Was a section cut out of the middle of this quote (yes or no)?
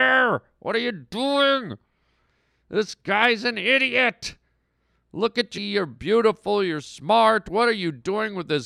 yes